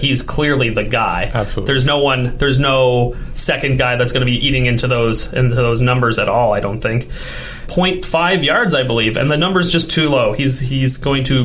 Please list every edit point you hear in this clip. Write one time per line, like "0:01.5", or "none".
0:07.7